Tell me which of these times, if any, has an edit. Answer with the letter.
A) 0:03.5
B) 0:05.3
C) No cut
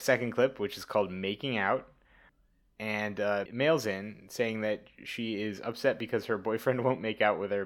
A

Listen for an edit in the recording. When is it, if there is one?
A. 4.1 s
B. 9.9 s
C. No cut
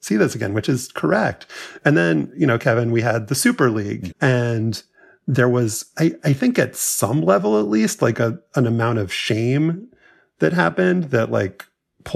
A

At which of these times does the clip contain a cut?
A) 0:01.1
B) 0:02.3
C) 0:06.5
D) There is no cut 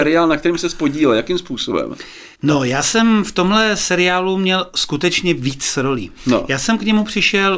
B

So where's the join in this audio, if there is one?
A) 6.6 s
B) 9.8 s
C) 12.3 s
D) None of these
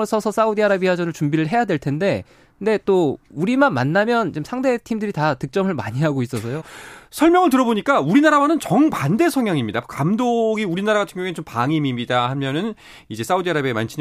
A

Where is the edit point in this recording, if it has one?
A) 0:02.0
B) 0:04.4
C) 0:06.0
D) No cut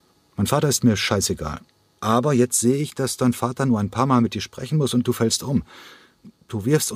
A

